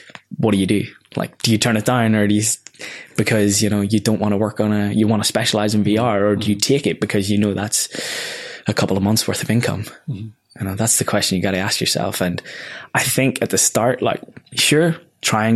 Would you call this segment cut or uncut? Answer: uncut